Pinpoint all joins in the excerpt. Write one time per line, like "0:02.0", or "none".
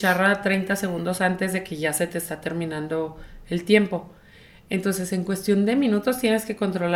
none